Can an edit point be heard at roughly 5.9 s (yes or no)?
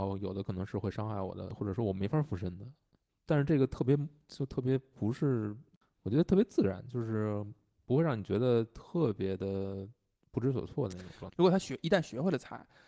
no